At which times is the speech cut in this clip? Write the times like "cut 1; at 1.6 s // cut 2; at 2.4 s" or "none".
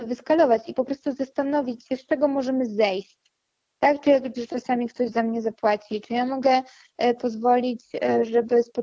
cut 1; at 4.3 s

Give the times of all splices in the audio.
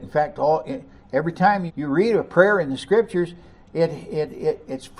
cut 1; at 1.7 s

